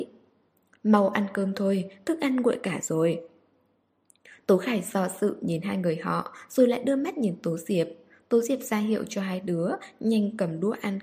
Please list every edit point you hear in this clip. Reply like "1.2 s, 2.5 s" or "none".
none